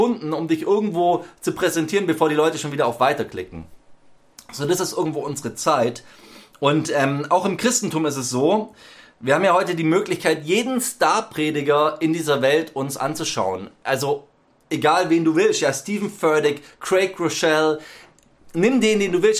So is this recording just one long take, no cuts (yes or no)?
yes